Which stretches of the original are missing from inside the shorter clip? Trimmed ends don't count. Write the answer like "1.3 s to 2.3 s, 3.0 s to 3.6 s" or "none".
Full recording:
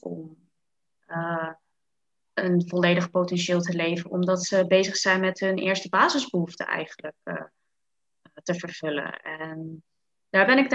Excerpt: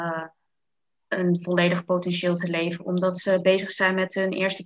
none